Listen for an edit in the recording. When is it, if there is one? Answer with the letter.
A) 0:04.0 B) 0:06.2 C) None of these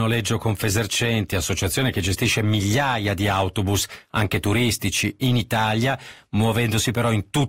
C